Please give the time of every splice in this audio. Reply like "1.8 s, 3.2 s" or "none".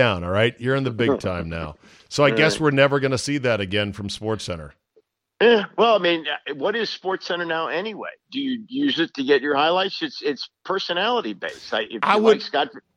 none

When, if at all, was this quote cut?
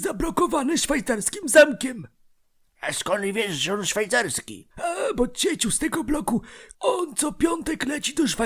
4.7 s, 6.7 s

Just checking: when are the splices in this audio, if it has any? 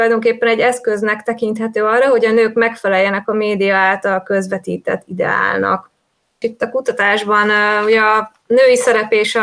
6.4 s

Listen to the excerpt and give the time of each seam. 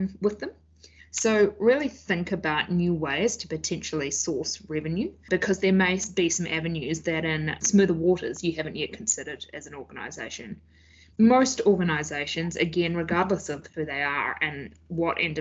1.0 s, 11.1 s

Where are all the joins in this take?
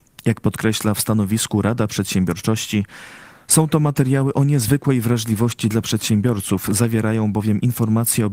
none

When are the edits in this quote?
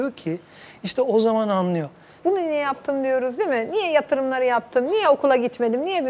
2.2 s

